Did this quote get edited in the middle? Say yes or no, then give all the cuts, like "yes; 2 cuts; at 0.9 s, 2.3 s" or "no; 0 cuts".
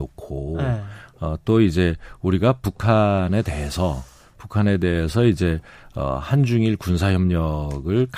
no; 0 cuts